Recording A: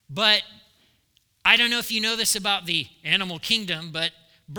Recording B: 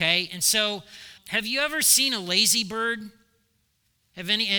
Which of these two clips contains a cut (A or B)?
B